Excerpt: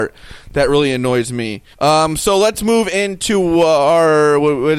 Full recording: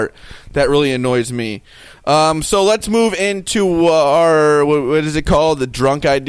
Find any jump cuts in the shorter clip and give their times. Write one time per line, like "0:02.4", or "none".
0:01.7